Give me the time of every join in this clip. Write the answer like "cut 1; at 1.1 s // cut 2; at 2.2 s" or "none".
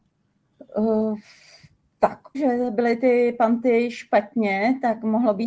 cut 1; at 2.3 s